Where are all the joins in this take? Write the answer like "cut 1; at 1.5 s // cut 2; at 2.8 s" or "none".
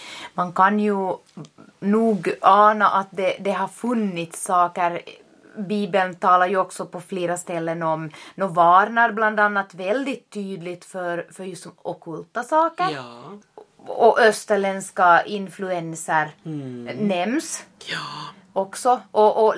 none